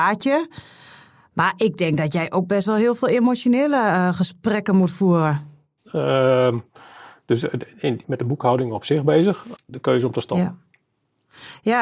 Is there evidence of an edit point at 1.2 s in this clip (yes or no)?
no